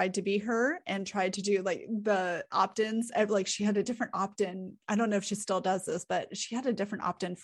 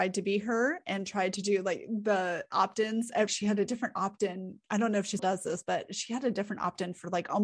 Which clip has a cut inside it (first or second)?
second